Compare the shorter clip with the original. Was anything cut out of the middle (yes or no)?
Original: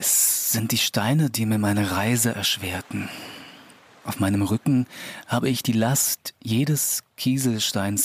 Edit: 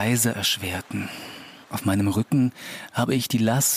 yes